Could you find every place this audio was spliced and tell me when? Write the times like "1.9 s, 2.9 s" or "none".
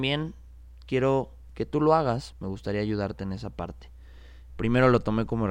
2.3 s, 4.5 s